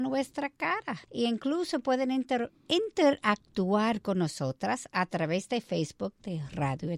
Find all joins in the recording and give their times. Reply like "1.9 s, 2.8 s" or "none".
1.0 s